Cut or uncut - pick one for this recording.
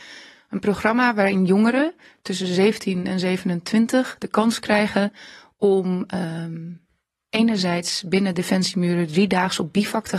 uncut